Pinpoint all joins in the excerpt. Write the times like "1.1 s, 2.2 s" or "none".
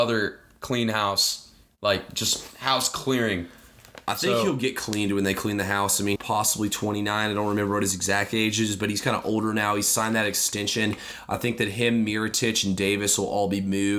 6.2 s